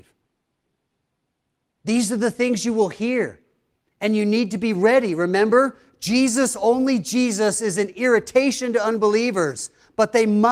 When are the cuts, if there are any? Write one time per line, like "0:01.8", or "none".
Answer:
none